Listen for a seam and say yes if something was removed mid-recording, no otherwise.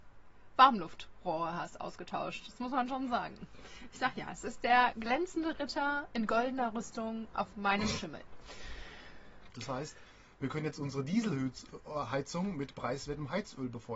yes